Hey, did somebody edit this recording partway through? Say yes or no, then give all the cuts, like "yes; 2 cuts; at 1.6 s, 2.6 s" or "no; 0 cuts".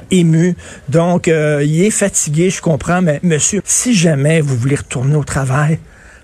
yes; 1 cut; at 3.6 s